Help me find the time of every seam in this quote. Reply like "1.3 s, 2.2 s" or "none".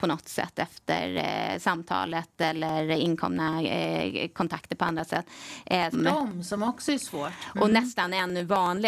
5.9 s